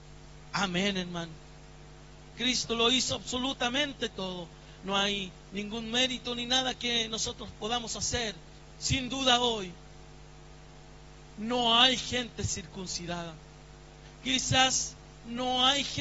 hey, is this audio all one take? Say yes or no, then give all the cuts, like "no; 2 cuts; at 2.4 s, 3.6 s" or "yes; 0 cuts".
no; 2 cuts; at 2.3 s, 8.8 s